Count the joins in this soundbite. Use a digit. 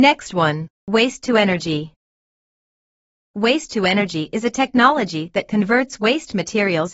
0